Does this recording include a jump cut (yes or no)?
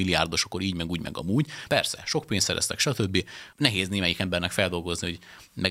yes